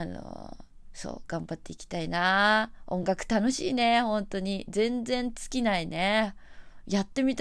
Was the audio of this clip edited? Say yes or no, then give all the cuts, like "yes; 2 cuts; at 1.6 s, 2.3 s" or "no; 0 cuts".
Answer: no; 0 cuts